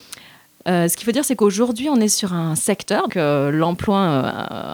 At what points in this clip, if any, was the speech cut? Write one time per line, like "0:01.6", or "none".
0:03.1